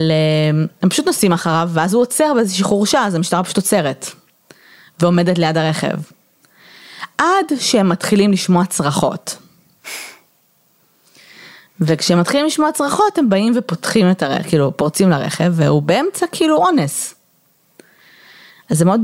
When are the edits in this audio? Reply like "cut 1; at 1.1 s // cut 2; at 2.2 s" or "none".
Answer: none